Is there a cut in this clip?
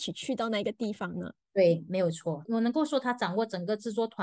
yes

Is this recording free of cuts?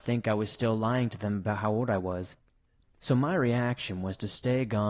no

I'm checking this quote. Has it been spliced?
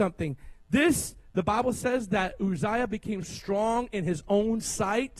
yes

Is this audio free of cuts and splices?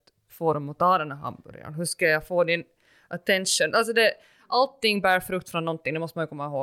yes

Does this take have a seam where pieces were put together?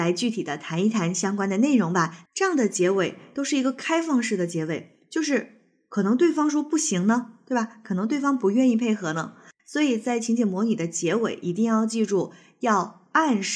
yes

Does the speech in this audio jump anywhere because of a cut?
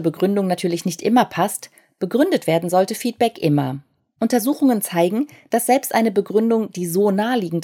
no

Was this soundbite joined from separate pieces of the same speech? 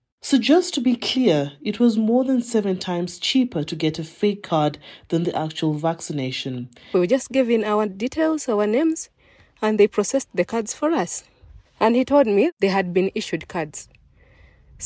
yes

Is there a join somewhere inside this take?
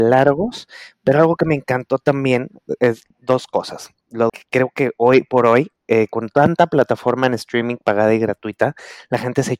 yes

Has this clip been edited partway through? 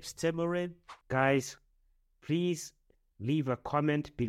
yes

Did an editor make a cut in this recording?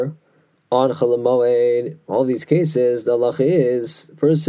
no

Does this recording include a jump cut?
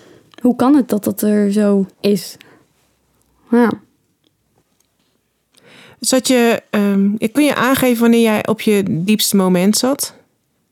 yes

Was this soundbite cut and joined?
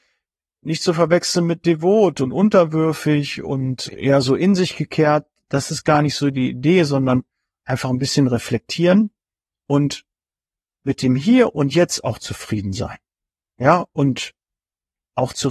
yes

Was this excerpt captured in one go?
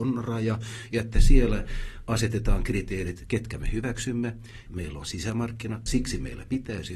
no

